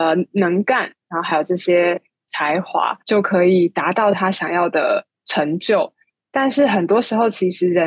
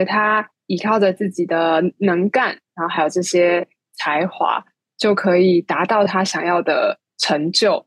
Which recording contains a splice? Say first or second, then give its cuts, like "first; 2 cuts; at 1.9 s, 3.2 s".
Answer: first; 1 cut; at 3.0 s